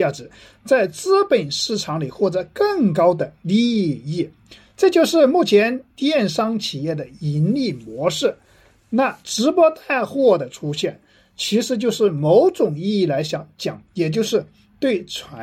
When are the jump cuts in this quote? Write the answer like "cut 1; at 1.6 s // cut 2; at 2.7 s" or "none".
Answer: none